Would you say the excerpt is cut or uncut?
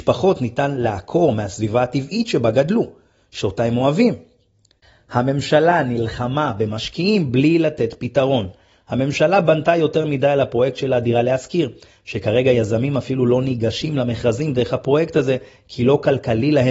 uncut